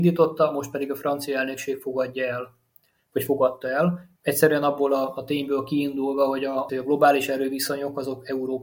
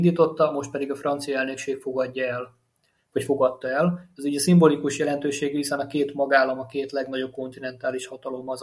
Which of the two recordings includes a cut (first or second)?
first